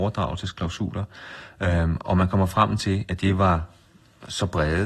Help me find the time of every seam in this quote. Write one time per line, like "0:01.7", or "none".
none